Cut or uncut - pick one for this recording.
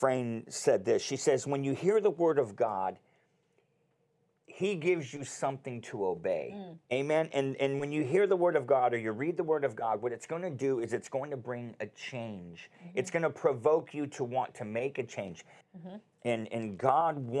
cut